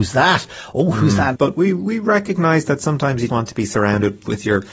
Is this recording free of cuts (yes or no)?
no